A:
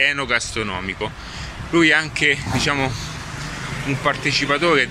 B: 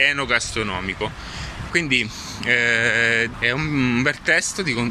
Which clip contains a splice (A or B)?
B